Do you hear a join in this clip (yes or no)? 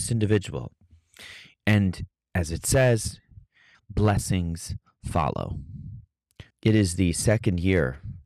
yes